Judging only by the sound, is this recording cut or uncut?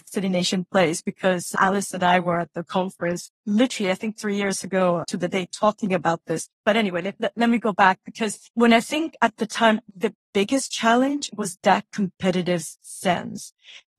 cut